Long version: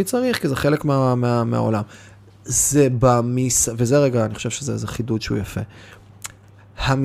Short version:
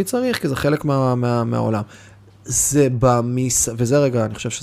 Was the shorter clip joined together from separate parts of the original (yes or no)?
no